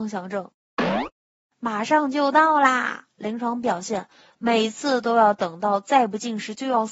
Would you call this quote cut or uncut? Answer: uncut